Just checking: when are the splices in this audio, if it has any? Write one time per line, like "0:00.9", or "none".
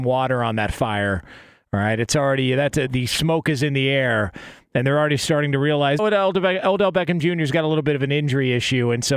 0:02.9
0:06.0

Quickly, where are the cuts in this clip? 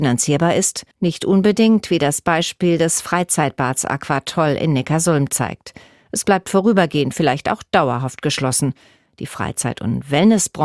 0:00.9

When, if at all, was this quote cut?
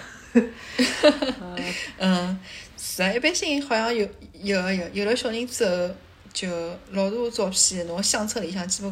none

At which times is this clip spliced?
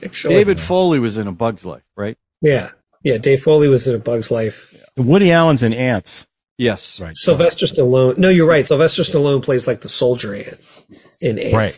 none

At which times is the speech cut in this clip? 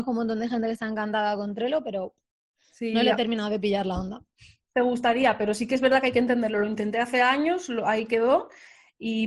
none

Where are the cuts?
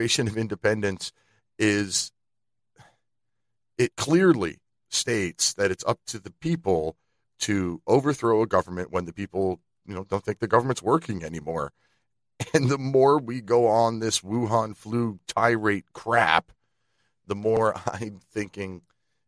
0:03.9

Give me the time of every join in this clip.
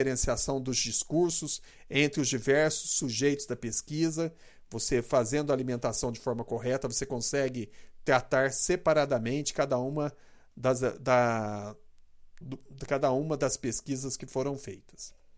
0:12.4

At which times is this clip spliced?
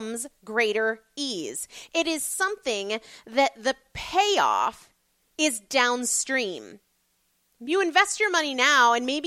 0:07.5

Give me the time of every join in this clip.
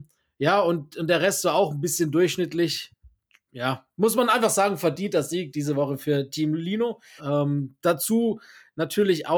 0:07.2

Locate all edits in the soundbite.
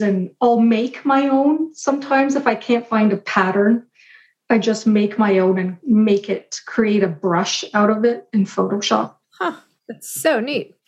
none

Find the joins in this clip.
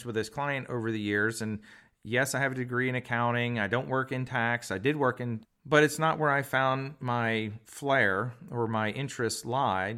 0:05.4

